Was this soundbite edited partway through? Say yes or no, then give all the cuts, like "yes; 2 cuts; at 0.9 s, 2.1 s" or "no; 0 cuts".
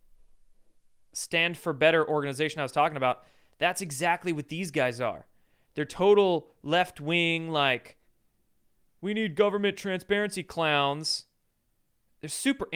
no; 0 cuts